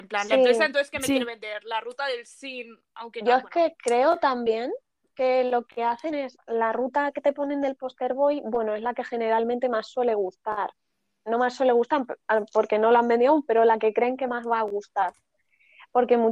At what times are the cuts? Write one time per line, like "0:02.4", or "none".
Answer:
none